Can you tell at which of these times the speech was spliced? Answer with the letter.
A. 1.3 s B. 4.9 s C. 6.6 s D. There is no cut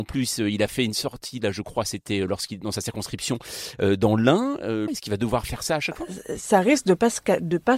B